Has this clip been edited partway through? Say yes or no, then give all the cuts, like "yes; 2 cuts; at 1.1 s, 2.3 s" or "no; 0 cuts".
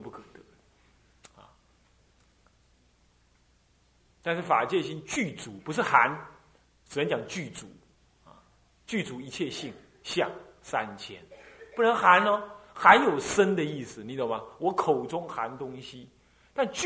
no; 0 cuts